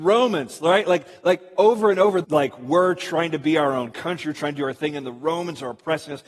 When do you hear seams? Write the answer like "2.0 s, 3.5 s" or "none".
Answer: 2.2 s